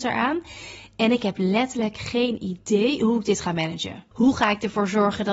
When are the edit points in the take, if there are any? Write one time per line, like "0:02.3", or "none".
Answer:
0:04.1